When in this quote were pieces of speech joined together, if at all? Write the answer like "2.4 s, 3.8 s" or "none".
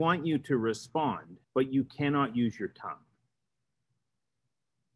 1.4 s